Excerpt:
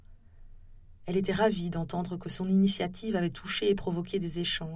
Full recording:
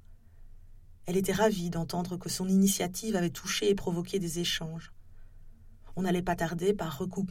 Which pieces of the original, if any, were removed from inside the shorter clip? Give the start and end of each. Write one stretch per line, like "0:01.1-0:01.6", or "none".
none